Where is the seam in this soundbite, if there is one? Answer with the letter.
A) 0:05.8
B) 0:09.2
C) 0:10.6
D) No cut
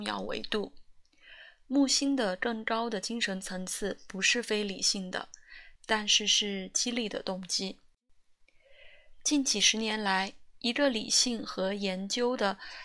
A